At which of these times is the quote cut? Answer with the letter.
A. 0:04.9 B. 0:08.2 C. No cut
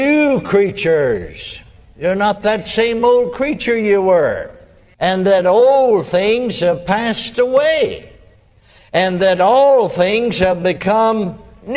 A